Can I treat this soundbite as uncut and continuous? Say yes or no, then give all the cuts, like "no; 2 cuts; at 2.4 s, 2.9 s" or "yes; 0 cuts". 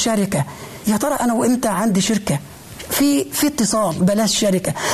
yes; 0 cuts